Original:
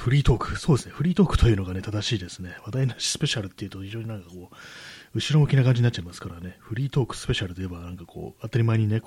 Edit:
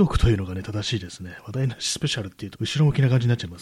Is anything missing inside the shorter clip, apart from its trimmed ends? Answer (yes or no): yes